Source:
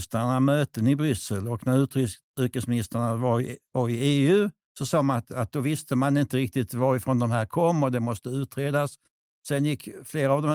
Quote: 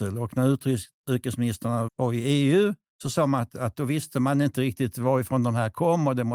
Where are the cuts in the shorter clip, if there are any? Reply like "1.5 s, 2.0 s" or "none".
1.9 s